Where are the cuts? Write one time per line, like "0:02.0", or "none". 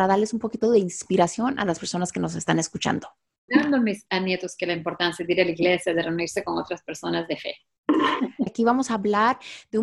0:03.5
0:08.5